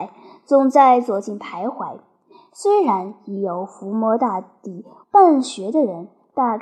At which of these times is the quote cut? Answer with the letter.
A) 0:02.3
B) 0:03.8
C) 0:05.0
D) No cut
C